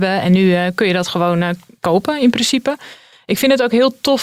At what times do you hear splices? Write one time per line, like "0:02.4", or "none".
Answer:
none